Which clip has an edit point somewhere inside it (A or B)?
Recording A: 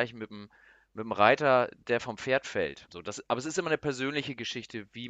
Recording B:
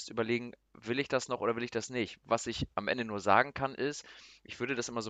A